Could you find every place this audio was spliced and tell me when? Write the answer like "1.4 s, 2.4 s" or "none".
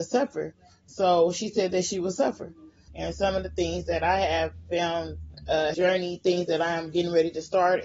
2.9 s, 5.7 s